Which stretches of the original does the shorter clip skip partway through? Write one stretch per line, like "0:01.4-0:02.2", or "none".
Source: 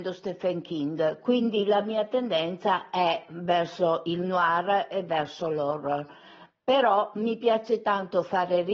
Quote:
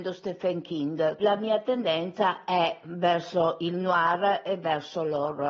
0:01.2-0:01.7

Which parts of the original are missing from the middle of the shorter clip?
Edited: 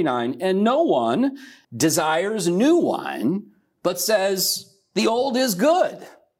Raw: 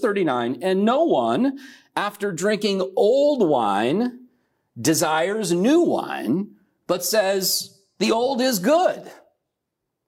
0:01.9-0:04.7

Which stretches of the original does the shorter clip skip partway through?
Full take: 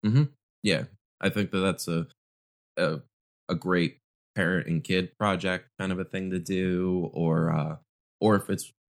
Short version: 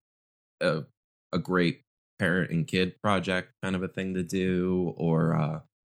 none

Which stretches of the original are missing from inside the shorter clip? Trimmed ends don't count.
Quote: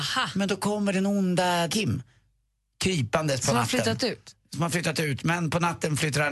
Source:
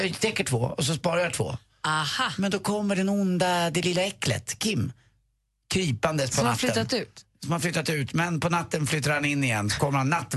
0:03.7-0:04.6

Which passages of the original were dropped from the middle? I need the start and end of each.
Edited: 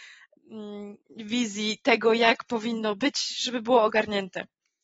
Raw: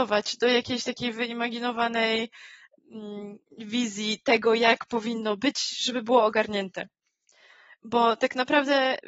none

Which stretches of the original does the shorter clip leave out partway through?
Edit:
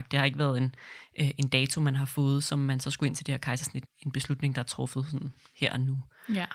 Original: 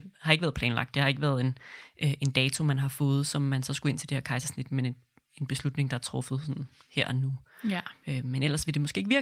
0:04.7-0:05.2

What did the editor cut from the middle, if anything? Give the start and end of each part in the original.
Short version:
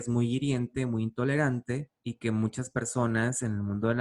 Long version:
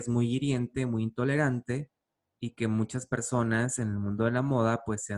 0:02.0-0:02.4

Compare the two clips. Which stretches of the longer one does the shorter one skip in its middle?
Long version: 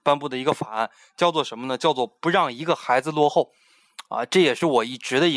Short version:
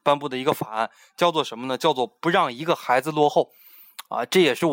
none

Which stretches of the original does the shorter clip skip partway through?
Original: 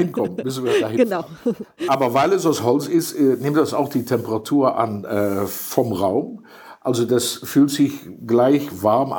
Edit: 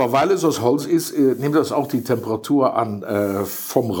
none

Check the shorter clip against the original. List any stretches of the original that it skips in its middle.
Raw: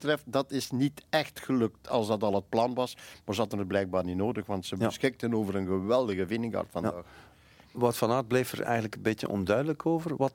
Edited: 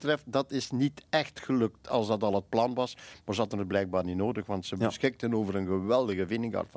none

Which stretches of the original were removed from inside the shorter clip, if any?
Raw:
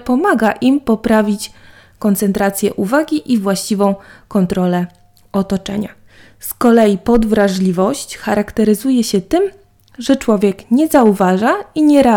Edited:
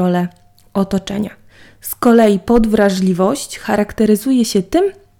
none

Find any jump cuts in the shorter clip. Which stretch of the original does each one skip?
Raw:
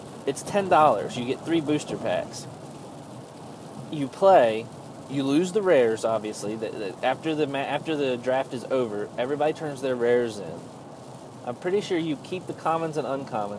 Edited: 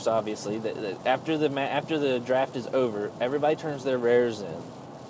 none

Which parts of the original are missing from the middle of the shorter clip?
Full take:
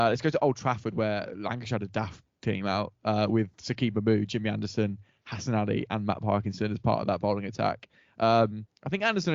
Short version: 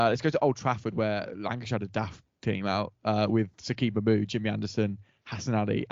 none

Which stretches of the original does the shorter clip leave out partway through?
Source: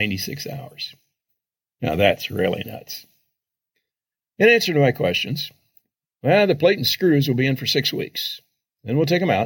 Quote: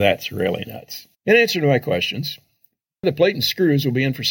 0:03.1-0:04.3
0:06.2-0:06.5

